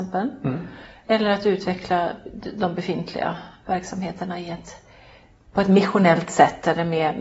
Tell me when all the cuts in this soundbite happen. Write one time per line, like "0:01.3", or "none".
0:05.4

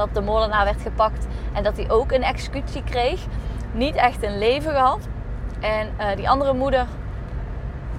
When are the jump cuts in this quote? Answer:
0:03.7

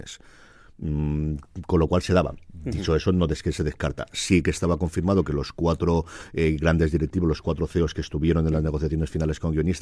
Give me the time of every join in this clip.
none

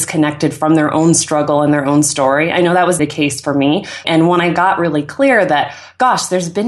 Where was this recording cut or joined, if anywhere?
0:03.0
0:04.0

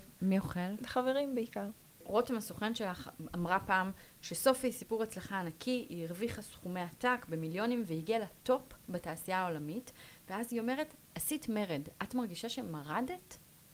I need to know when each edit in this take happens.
none

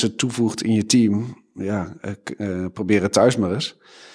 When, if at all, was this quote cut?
none

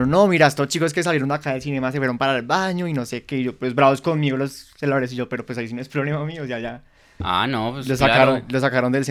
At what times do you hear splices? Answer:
none

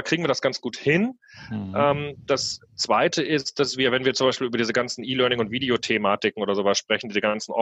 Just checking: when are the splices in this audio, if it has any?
none

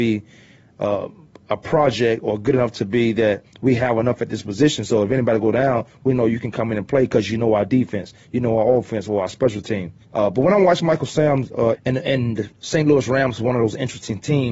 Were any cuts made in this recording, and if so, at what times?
0:10.0
0:11.7

